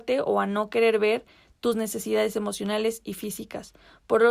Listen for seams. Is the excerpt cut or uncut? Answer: uncut